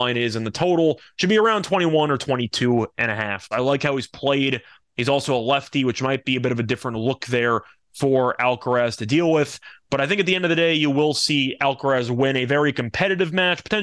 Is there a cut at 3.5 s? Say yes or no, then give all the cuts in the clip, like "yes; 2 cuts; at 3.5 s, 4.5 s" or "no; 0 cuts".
yes; 1 cut; at 3.5 s